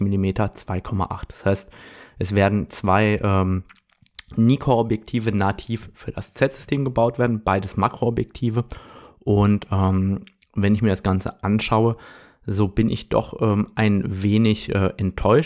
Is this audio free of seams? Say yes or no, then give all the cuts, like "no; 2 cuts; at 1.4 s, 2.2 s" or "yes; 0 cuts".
yes; 0 cuts